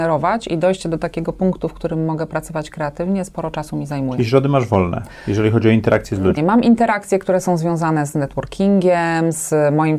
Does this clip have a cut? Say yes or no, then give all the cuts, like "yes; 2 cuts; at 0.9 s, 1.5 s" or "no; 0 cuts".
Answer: yes; 1 cut; at 6.4 s